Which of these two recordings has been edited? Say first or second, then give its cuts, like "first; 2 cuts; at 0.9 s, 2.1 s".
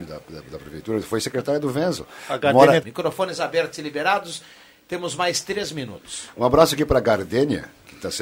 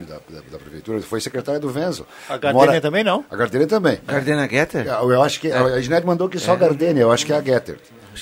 first; 1 cut; at 2.8 s